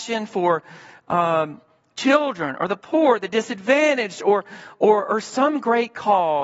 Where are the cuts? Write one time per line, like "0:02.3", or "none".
none